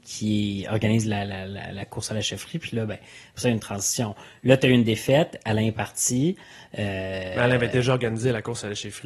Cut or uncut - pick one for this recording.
uncut